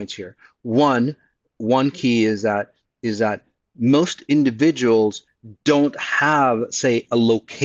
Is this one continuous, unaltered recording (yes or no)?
yes